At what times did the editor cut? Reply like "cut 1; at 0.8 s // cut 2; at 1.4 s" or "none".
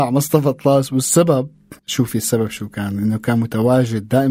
cut 1; at 1.8 s